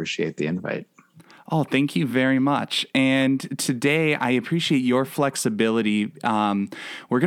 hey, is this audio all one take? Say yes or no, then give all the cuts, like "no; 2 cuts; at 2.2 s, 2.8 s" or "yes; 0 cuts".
yes; 0 cuts